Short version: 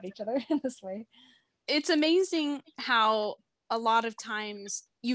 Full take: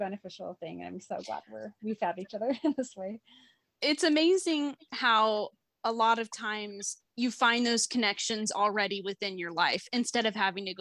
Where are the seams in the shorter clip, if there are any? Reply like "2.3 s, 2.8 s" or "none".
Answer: none